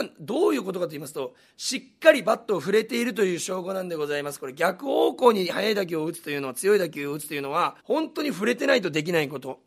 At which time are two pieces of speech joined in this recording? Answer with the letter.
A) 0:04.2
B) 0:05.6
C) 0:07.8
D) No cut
C